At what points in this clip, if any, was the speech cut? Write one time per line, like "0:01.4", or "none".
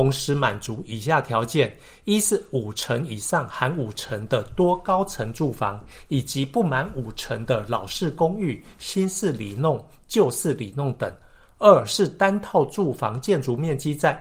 none